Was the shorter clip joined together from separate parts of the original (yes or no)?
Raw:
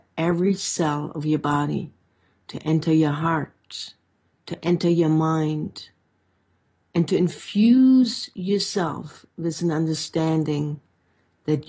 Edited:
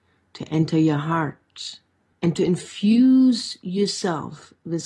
yes